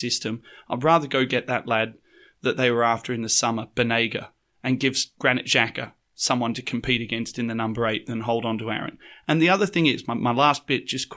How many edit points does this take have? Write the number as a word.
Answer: zero